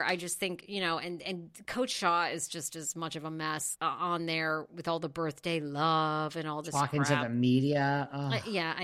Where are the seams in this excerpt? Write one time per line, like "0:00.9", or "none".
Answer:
0:03.7